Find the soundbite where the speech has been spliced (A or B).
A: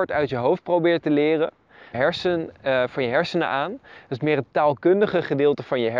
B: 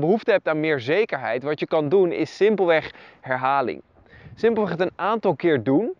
A